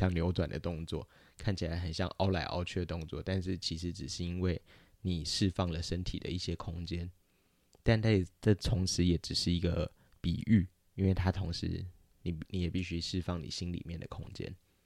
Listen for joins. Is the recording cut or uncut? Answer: uncut